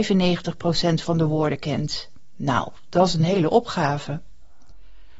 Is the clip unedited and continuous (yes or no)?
yes